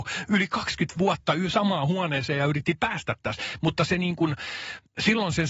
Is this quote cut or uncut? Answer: uncut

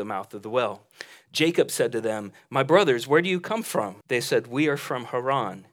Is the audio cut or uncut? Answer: cut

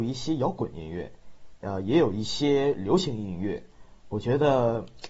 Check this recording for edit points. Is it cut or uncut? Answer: uncut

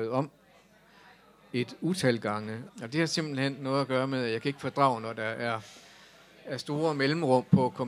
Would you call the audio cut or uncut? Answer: cut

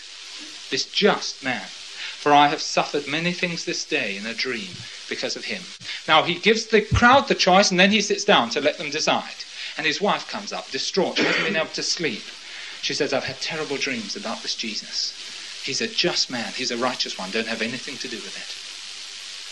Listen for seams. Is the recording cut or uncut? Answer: uncut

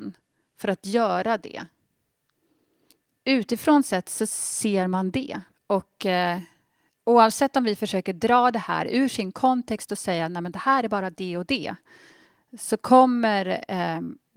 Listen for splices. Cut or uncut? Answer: cut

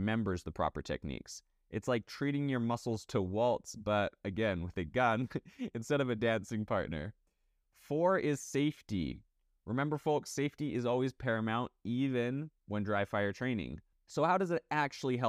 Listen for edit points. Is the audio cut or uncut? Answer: cut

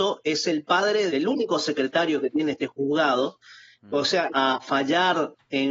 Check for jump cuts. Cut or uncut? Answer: cut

